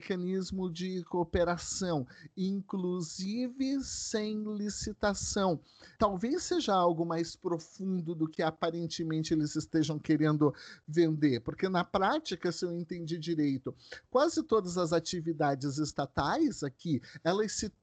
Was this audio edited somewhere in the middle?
no; 0 cuts

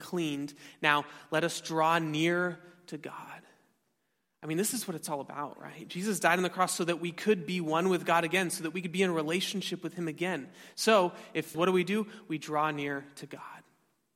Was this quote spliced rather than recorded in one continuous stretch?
yes; 1 cut; at 11.5 s

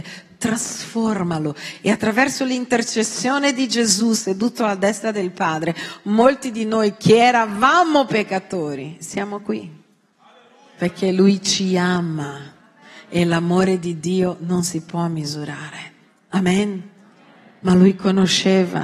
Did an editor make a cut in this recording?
no; 0 cuts

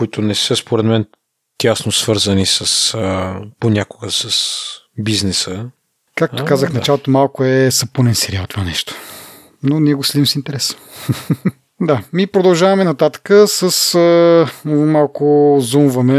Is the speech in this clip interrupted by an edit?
no; 0 cuts

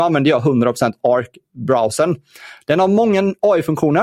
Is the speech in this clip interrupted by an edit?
no; 0 cuts

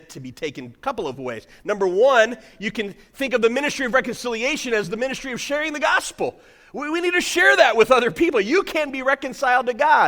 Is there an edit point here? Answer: no; 0 cuts

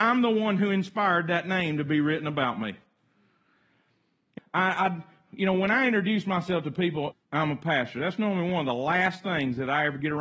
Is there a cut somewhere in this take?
yes; 2 cuts; at 4.4 s, 7.1 s

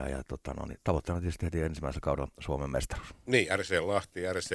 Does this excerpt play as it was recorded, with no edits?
yes; 0 cuts

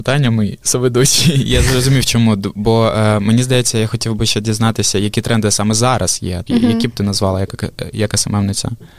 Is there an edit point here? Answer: yes; 1 cut; at 6.5 s

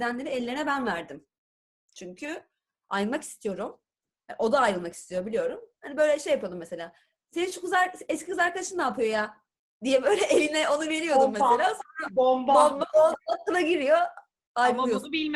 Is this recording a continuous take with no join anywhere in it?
yes; 0 cuts

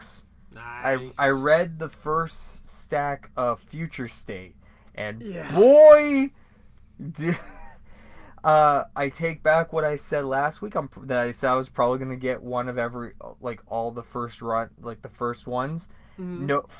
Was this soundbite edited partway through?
no; 0 cuts

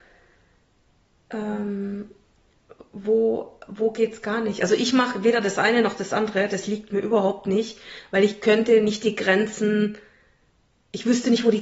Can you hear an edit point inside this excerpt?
no; 0 cuts

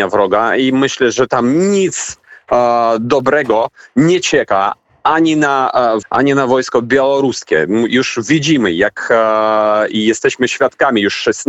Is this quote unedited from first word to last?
no; 1 cut; at 6.0 s

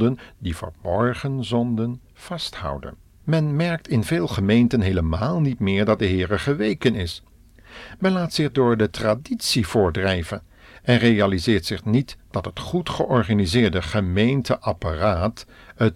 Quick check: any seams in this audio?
yes; 1 cut; at 3.2 s

